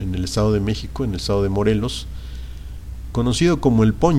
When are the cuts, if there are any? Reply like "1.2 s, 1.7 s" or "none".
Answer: 3.1 s